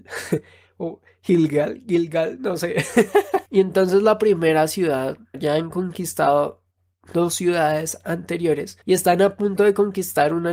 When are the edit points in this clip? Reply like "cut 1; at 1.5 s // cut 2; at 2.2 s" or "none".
cut 1; at 3.5 s // cut 2; at 5.3 s // cut 3; at 8.8 s